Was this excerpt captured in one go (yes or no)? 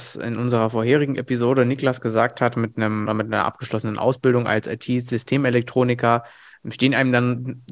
no